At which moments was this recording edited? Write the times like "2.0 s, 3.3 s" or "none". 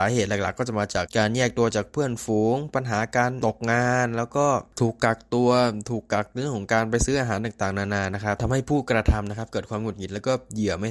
1.1 s

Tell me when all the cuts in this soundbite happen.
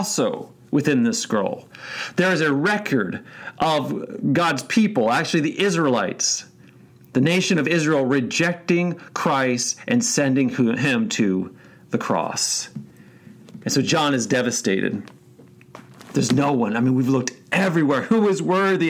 none

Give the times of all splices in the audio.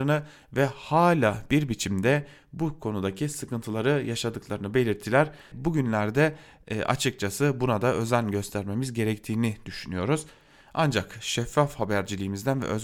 5.5 s

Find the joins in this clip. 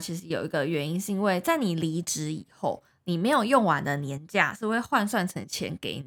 none

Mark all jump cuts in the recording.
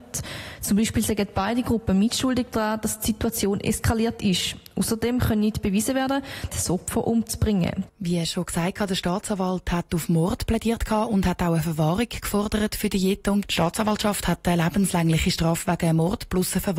6.5 s, 7.9 s, 13.4 s

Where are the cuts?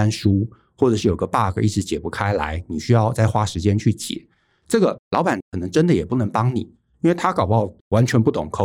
none

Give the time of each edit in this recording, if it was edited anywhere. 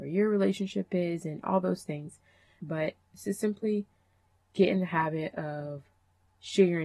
2.6 s

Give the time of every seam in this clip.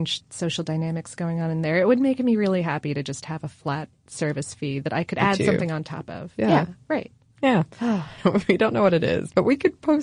6.4 s, 8.2 s

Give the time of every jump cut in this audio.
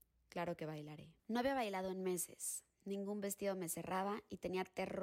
1.2 s

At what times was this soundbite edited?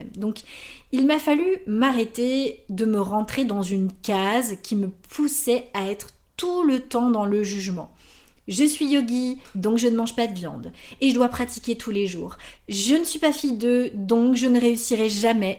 12.6 s

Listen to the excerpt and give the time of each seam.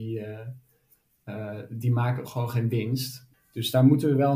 3.3 s

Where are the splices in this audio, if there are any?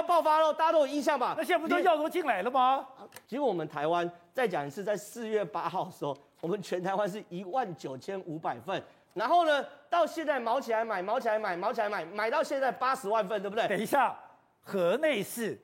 3.2 s

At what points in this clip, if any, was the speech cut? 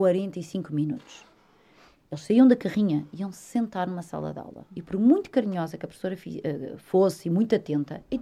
none

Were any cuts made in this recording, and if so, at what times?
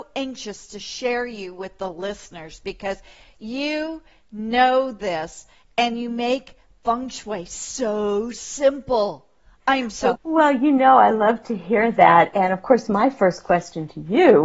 10.2 s

